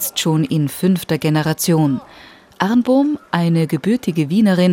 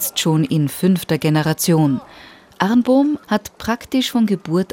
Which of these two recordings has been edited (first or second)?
second